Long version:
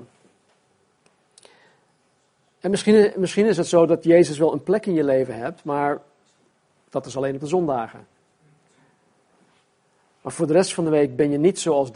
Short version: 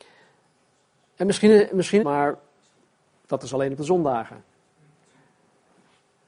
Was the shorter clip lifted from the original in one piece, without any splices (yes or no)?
no